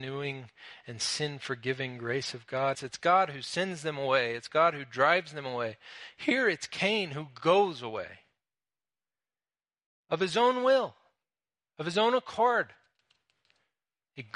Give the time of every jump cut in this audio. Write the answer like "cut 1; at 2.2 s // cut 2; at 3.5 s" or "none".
cut 1; at 2.7 s